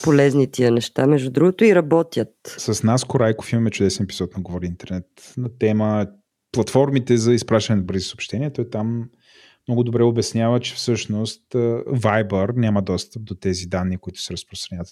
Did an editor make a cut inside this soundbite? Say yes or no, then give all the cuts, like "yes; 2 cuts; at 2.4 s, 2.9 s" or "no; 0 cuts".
no; 0 cuts